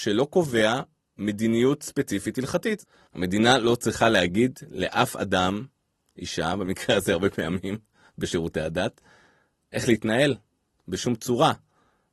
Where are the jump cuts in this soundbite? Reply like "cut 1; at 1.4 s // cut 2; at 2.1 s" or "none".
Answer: cut 1; at 3.1 s